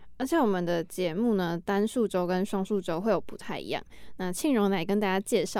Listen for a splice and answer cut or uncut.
uncut